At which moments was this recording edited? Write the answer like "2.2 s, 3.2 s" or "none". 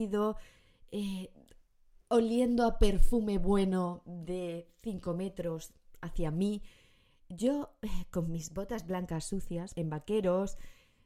9.7 s